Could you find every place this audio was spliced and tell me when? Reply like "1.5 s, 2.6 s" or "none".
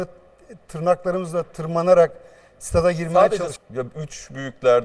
3.6 s

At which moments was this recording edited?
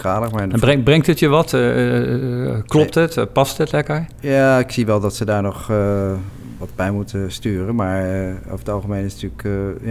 none

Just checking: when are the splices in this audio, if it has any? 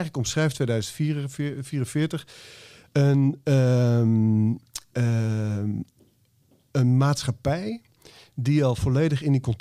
none

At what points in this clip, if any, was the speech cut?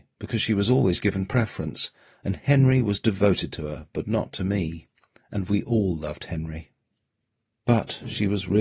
7.6 s

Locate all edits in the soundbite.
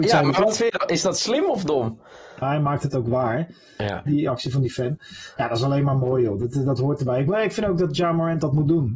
2.4 s, 4.1 s

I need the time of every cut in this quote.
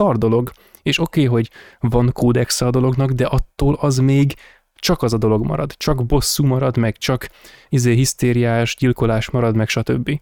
none

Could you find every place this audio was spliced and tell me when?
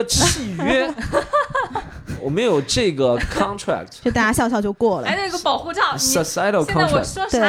none

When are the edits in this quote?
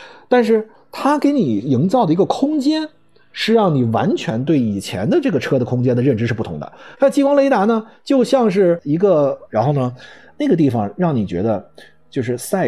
6.9 s, 9.5 s

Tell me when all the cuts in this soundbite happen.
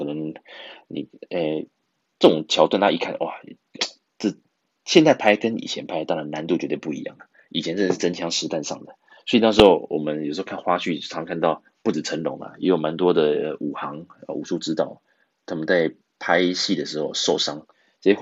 none

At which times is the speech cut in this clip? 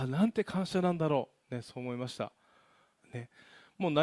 2.9 s

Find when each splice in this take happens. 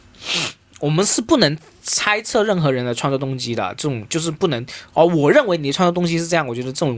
none

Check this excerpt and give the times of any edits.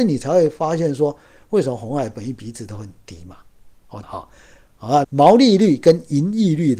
4.0 s, 5.0 s

